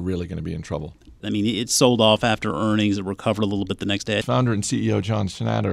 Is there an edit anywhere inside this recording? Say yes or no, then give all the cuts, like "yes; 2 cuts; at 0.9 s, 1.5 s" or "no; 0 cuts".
yes; 2 cuts; at 1.2 s, 4.2 s